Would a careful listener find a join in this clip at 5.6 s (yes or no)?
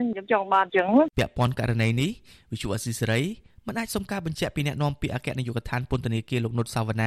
no